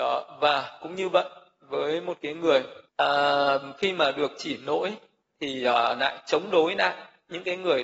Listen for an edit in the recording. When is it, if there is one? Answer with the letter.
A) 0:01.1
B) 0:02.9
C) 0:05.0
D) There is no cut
B